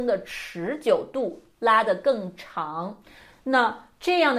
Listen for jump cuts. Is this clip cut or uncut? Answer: cut